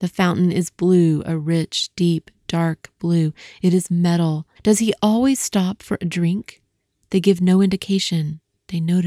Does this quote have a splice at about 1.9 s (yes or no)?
no